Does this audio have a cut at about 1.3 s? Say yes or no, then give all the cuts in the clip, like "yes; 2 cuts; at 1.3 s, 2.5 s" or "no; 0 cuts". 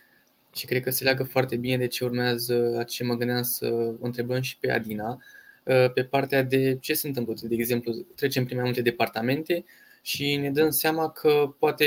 yes; 1 cut; at 1.3 s